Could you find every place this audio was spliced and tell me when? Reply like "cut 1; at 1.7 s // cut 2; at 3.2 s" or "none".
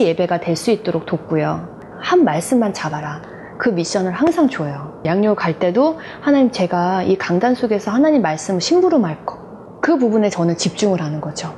cut 1; at 1.9 s